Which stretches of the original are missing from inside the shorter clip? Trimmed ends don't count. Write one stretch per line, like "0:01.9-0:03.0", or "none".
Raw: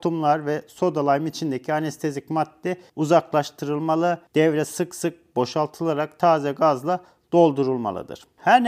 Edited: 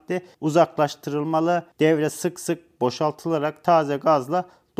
none